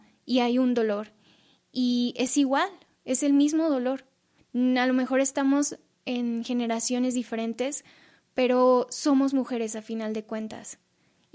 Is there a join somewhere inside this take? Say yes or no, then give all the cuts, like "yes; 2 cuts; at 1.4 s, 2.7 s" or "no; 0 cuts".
yes; 1 cut; at 4.4 s